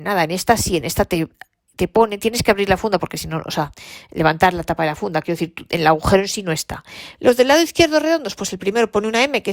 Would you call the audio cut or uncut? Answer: cut